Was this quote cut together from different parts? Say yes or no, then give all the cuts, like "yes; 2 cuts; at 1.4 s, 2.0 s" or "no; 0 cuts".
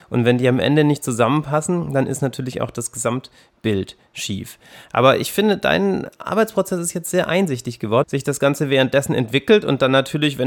yes; 1 cut; at 8.0 s